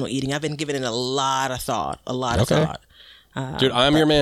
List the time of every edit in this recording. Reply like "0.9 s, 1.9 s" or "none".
none